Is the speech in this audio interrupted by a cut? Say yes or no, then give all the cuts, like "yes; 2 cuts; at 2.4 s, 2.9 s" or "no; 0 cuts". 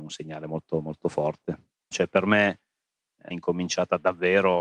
yes; 2 cuts; at 1.9 s, 3.3 s